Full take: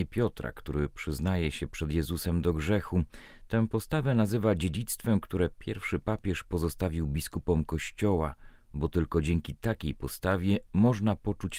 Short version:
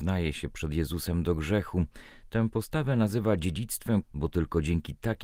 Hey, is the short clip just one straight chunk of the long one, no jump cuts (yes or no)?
no